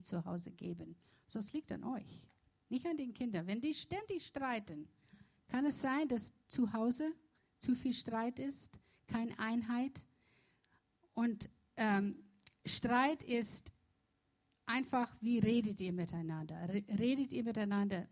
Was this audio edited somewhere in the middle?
no; 0 cuts

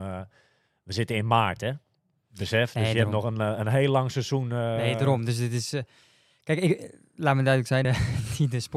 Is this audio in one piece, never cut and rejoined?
no; 1 cut; at 7.8 s

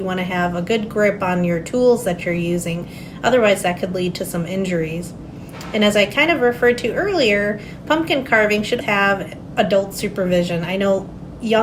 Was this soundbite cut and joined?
yes; 1 cut; at 8.8 s

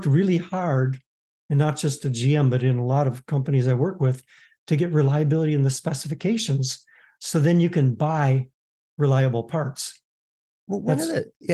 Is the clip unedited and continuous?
yes; 0 cuts

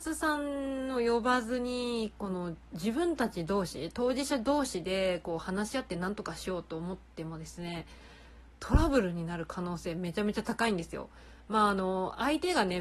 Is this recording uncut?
yes; 0 cuts

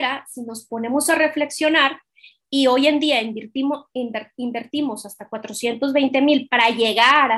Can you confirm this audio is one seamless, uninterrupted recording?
yes; 0 cuts

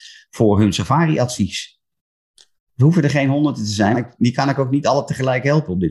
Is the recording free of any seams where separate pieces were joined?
no; 1 cut; at 3.9 s

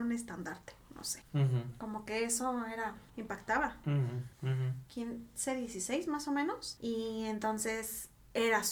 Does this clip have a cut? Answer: yes; 2 cuts; at 4.9 s, 6.8 s

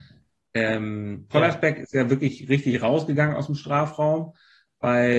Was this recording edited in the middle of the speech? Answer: no; 0 cuts

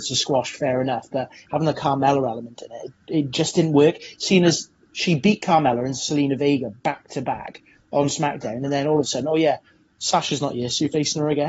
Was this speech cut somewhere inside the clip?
no; 0 cuts

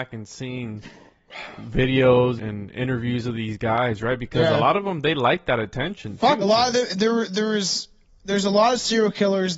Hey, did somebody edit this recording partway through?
yes; 2 cuts; at 2.4 s, 6.4 s

